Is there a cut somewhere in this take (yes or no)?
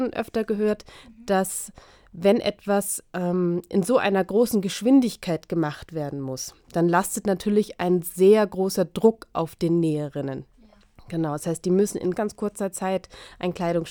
yes